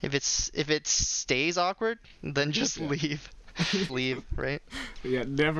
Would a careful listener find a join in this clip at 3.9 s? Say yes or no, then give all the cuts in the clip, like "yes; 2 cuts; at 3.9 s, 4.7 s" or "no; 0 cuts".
yes; 1 cut; at 3.9 s